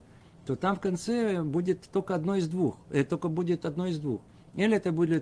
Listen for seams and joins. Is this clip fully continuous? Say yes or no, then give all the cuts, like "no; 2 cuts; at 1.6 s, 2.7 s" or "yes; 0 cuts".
yes; 0 cuts